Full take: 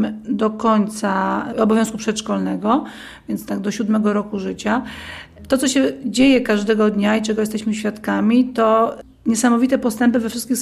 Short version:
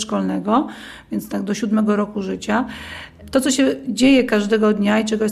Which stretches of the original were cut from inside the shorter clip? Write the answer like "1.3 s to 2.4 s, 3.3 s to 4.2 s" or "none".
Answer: none